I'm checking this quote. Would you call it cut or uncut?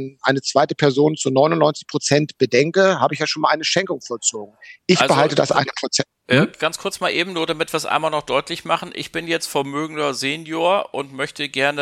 uncut